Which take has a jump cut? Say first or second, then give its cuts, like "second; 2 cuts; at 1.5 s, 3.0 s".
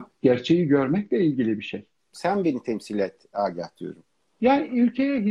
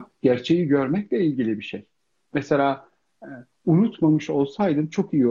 first; 1 cut; at 2.1 s